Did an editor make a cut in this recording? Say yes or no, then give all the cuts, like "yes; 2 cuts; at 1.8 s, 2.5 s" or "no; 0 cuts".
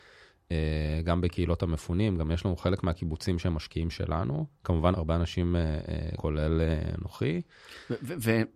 yes; 2 cuts; at 4.9 s, 6.2 s